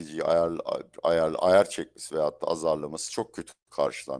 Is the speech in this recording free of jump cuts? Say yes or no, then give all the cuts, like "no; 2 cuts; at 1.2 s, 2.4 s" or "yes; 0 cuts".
yes; 0 cuts